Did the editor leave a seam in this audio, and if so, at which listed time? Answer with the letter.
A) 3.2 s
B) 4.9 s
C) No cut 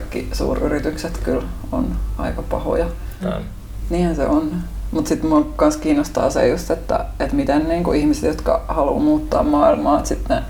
A